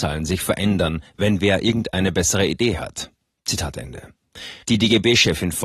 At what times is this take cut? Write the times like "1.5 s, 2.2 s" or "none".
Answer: 4.6 s